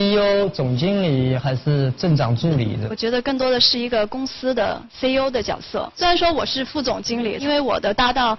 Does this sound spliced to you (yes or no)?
yes